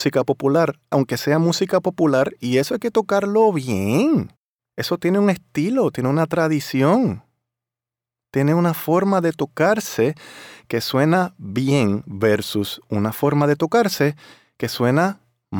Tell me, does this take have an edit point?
yes; 1 cut; at 0.9 s

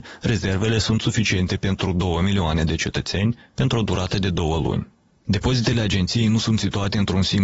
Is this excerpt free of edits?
yes; 0 cuts

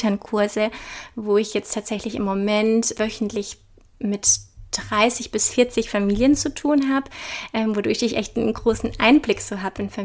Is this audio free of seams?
no; 1 cut; at 3.0 s

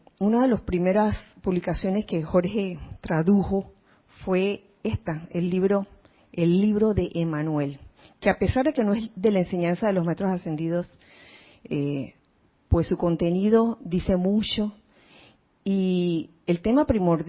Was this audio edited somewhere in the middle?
no; 0 cuts

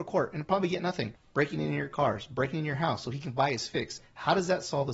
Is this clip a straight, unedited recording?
no; 1 cut; at 1.1 s

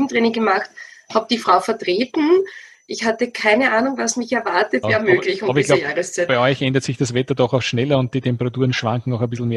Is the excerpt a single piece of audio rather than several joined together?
no; 1 cut; at 4.8 s

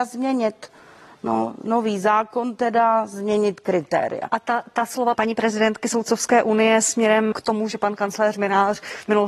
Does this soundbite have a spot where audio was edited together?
yes; 2 cuts; at 5.1 s, 7.3 s

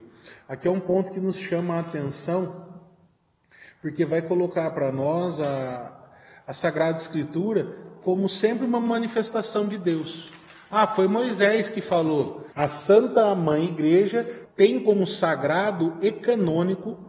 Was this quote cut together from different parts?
yes; 2 cuts; at 12.5 s, 14.5 s

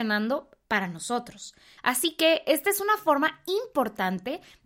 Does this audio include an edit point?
yes; 1 cut; at 1.8 s

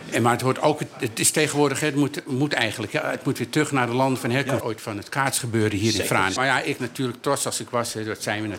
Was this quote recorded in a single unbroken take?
no; 2 cuts; at 4.6 s, 6.4 s

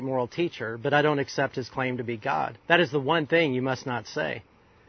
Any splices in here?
yes; 1 cut; at 2.6 s

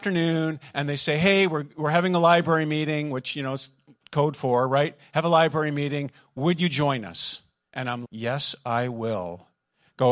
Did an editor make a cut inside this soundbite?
yes; 1 cut; at 8.0 s

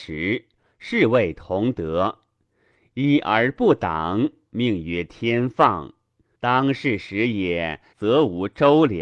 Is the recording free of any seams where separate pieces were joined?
no; 2 cuts; at 6.3 s, 7.9 s

